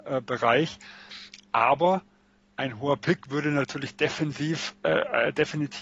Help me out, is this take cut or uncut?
uncut